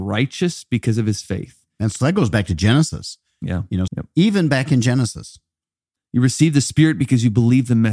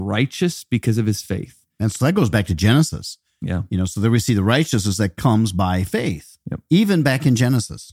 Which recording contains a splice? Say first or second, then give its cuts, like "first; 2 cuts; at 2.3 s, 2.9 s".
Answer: first; 2 cuts; at 3.9 s, 6.0 s